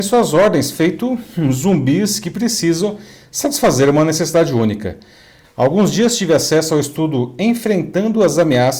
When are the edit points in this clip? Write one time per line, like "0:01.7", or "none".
0:05.4